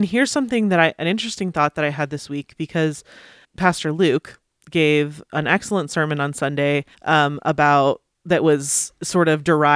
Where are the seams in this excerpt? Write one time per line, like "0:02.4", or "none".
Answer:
0:03.4
0:06.9